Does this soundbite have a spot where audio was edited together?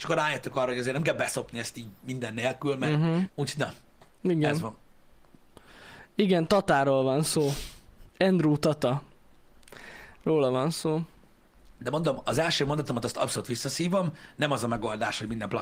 yes; 1 cut; at 3.3 s

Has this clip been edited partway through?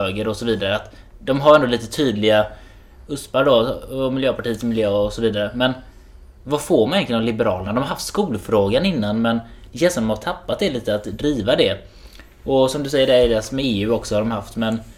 no; 0 cuts

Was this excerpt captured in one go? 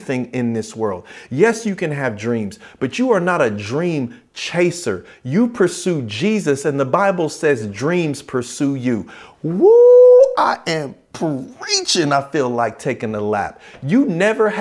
no; 1 cut; at 1.3 s

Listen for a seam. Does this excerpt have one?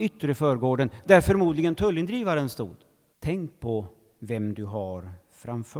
yes; 1 cut; at 3.1 s

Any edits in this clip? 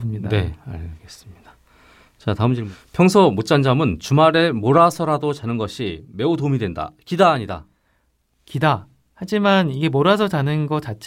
no; 0 cuts

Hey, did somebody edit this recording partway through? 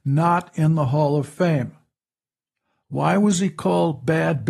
no; 0 cuts

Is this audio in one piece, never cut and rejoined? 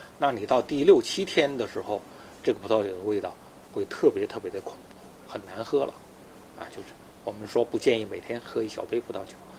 yes; 0 cuts

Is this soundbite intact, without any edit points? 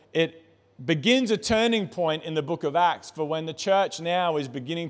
yes; 0 cuts

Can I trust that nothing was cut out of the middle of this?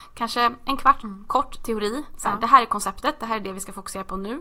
no; 1 cut; at 1.0 s

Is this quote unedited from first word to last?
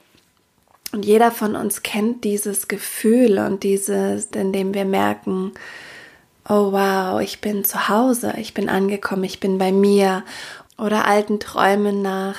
no; 2 cuts; at 4.3 s, 10.7 s

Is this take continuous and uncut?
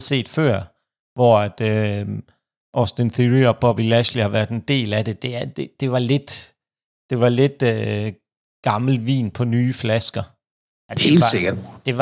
yes; 0 cuts

